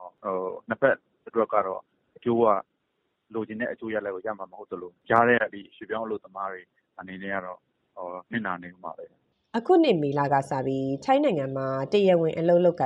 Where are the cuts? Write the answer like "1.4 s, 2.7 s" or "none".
none